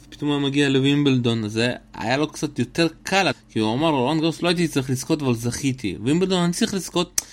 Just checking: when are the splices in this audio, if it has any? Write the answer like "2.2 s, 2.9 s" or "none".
3.3 s